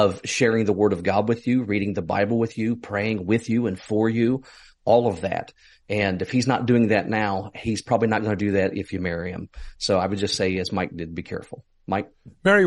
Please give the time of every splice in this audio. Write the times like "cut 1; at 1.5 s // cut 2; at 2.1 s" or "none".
none

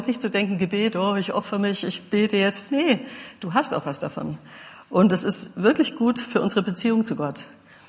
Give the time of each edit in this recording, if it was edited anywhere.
none

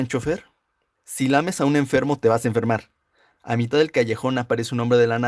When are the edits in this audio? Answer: cut 1; at 1.0 s

